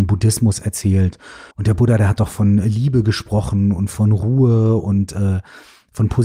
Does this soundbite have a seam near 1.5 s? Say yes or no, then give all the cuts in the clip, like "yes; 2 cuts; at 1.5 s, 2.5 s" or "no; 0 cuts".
yes; 1 cut; at 1.5 s